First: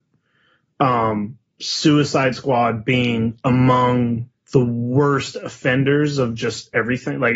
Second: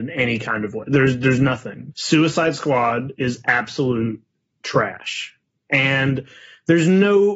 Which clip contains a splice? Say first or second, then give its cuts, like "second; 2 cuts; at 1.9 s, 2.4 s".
second; 1 cut; at 1.9 s